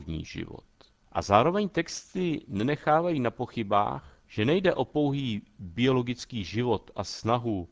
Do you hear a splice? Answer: yes; 2 cuts; at 1.0 s, 4.2 s

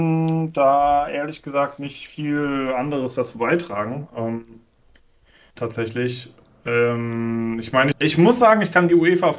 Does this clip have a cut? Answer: yes; 2 cuts; at 5.5 s, 7.9 s

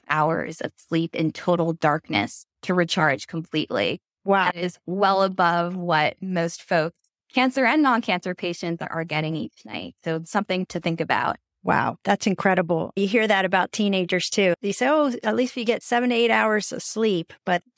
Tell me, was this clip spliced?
no; 0 cuts

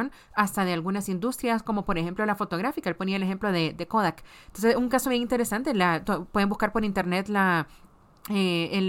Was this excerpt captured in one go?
yes; 0 cuts

